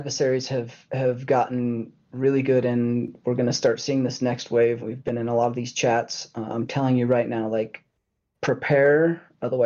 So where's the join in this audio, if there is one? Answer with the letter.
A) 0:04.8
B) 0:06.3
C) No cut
A